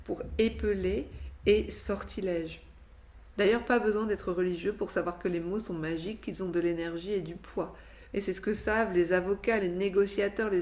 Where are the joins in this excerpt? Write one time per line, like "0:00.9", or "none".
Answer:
0:03.3
0:08.1
0:09.6